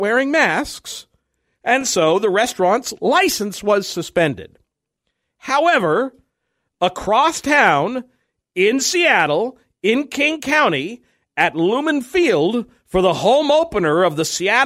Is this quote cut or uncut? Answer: uncut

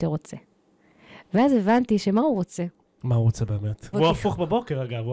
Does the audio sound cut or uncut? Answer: cut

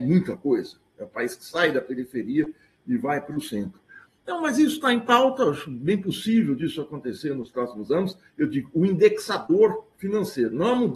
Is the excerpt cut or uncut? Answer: uncut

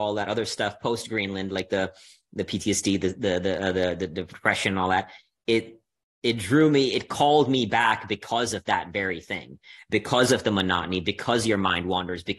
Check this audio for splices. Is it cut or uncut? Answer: uncut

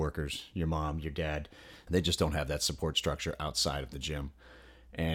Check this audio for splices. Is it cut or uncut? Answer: cut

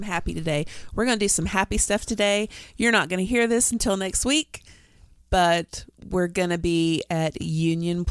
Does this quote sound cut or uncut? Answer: uncut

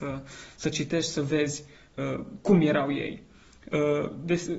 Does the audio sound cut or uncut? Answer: uncut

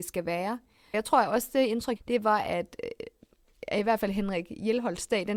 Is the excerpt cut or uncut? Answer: cut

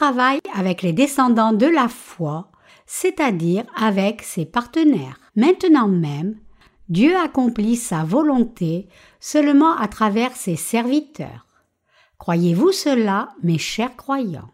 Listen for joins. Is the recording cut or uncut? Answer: cut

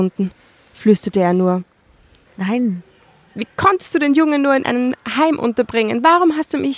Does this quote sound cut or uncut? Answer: cut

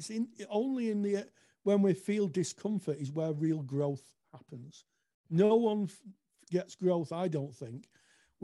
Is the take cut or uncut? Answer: uncut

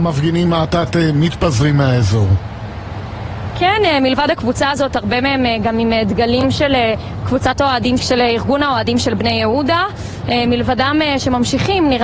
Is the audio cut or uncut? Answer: cut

